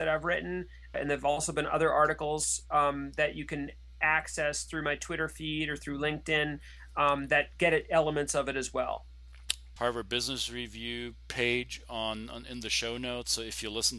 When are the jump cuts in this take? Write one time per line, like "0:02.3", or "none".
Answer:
0:00.9
0:09.8